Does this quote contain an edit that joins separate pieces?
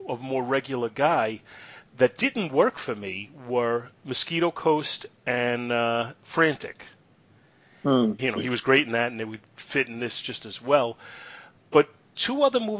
yes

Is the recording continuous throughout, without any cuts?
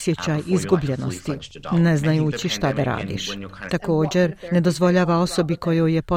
no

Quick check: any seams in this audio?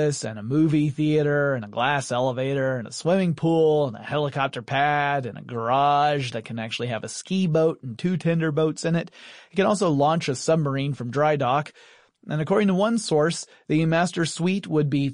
no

